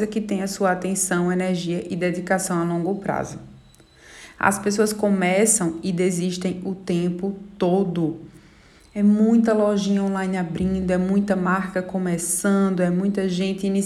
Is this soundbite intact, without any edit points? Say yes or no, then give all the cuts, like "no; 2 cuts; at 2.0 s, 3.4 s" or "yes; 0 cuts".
yes; 0 cuts